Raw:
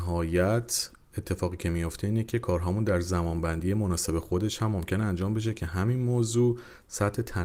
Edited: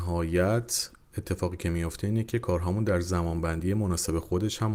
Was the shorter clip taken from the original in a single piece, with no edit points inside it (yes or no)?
yes